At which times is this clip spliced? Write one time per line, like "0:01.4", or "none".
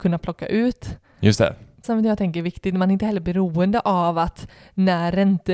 0:01.8